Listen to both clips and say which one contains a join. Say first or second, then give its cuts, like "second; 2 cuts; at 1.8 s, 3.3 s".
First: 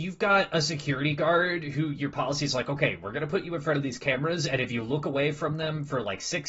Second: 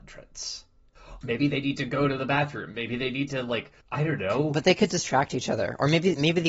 second; 2 cuts; at 1.2 s, 3.8 s